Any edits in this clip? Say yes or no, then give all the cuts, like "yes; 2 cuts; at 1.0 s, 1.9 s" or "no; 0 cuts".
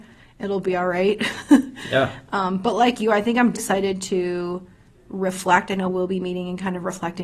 yes; 1 cut; at 3.5 s